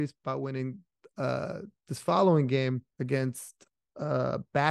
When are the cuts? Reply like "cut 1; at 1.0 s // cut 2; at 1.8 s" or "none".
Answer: cut 1; at 2.9 s